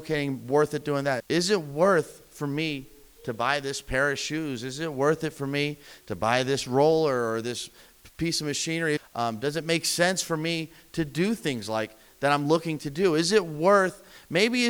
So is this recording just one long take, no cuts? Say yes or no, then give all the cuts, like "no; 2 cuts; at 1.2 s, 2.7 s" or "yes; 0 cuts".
no; 2 cuts; at 1.2 s, 9.0 s